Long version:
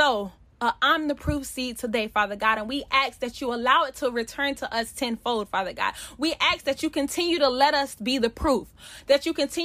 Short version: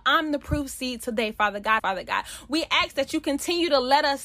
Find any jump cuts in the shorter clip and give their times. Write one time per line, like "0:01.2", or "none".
0:01.8